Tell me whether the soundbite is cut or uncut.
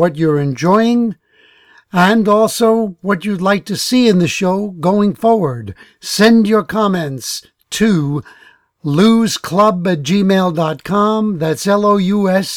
uncut